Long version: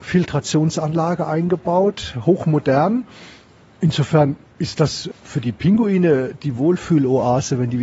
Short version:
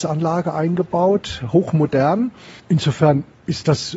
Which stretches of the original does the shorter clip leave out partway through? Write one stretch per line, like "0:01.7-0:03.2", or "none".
0:03.3-0:03.7

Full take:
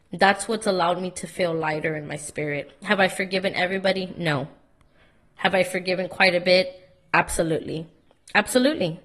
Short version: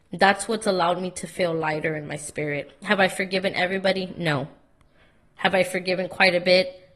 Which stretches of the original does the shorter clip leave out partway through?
none

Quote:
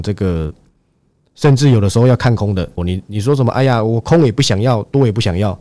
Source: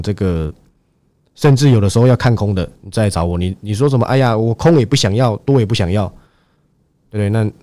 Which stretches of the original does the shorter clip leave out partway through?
0:02.8-0:03.3

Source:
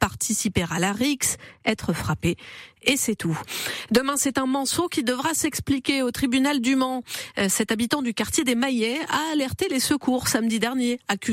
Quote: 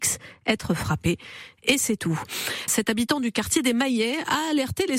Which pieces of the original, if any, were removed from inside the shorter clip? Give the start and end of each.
0:03.9-0:07.5

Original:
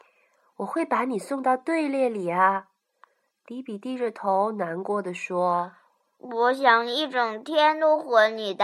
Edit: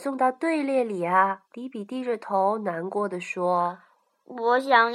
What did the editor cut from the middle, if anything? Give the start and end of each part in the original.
0:02.7-0:03.4

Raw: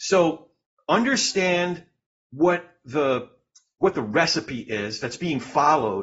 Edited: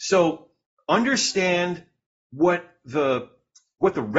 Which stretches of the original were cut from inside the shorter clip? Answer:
none

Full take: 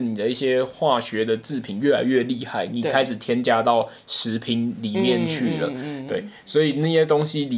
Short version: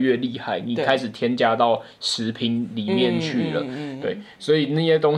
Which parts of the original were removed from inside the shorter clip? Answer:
none

